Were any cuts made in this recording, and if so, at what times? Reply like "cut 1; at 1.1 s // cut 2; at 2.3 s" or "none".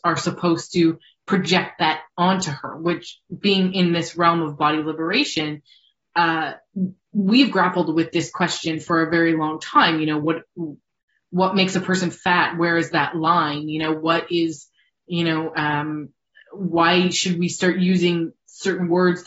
none